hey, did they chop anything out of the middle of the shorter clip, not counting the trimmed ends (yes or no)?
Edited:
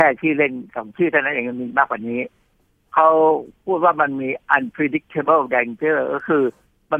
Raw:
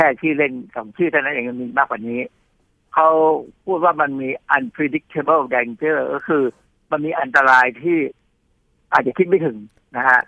no